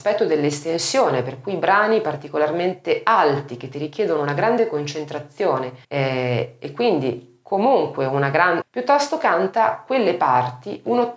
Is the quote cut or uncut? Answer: cut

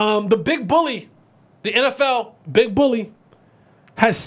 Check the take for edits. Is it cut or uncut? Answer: cut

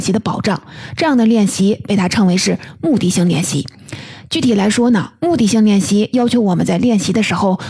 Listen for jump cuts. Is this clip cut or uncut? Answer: uncut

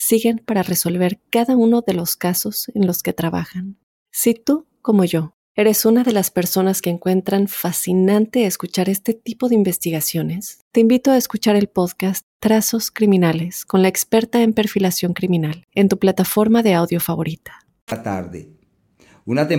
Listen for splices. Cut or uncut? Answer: cut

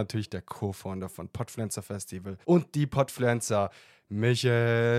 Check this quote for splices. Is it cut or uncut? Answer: cut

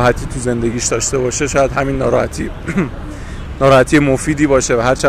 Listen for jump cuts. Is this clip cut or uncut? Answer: cut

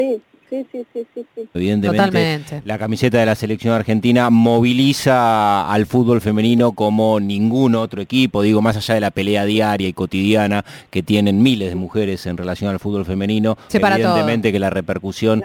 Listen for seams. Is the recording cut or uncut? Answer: cut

